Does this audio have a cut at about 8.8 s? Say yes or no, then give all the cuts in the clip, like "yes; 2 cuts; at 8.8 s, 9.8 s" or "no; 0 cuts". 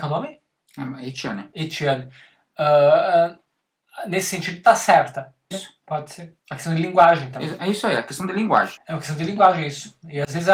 yes; 2 cuts; at 5.5 s, 8.8 s